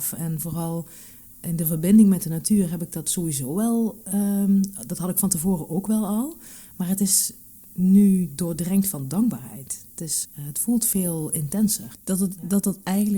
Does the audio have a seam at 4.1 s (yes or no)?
no